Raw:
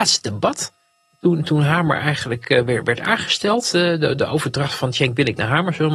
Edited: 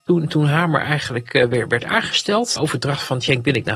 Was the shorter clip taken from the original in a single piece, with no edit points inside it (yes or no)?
no